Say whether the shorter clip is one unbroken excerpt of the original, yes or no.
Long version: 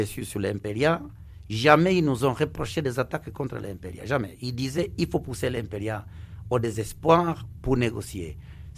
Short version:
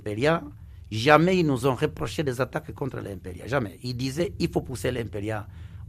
yes